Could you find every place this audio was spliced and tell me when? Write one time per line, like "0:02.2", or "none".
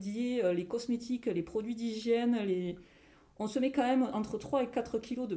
none